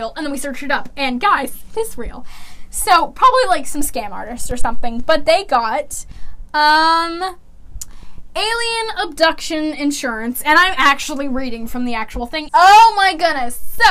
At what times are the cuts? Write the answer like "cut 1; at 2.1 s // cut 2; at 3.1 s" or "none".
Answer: cut 1; at 12.5 s

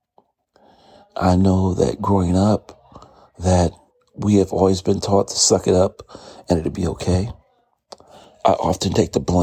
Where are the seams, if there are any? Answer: none

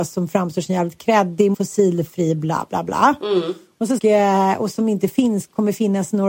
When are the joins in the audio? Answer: cut 1; at 1.5 s // cut 2; at 4.0 s

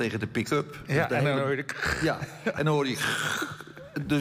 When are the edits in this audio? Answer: none

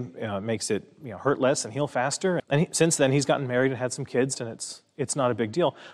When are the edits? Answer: cut 1; at 2.4 s // cut 2; at 4.3 s

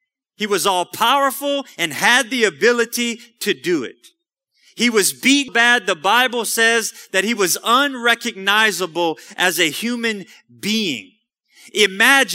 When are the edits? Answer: cut 1; at 5.5 s

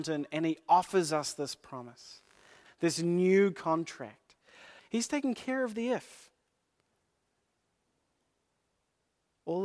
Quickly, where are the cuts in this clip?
cut 1; at 2.7 s // cut 2; at 4.8 s

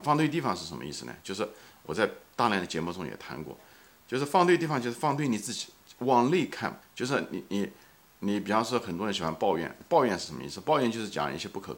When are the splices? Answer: cut 1; at 6.8 s

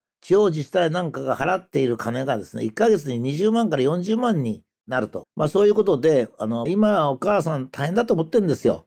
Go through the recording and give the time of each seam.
cut 1; at 5.2 s // cut 2; at 6.7 s

